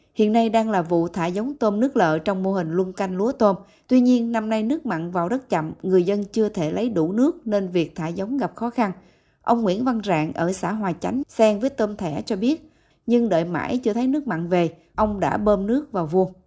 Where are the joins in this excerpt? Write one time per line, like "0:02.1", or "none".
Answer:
0:11.2
0:12.9
0:14.9

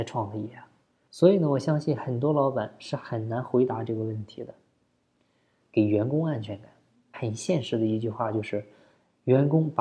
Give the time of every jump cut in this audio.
0:01.1
0:05.6
0:07.1

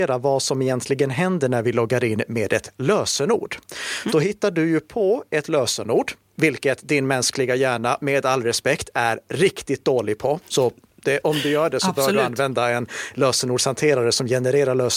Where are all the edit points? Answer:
0:04.1

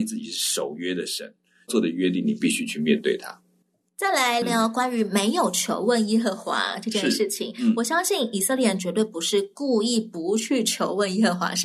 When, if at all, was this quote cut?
0:04.4

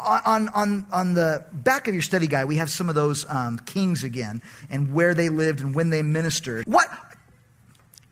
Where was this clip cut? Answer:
0:06.6

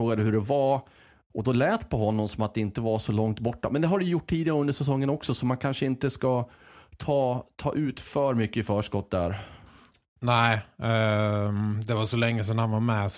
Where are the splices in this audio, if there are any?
none

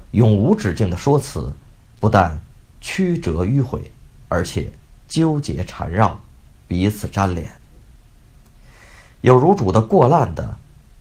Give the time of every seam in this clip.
none

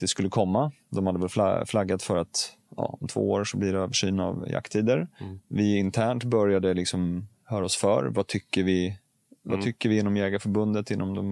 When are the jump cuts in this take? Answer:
none

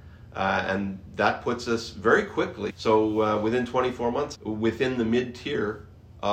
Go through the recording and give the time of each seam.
0:02.7
0:04.3

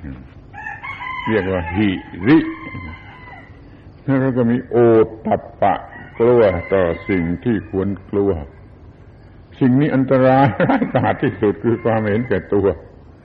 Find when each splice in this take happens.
none

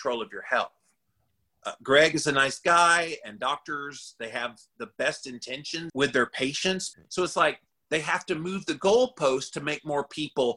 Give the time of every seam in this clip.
0:05.9
0:06.9

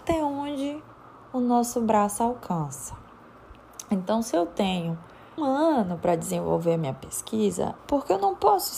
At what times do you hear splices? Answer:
0:05.4
0:07.8

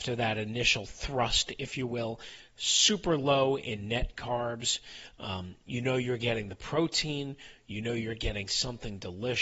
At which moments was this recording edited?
none

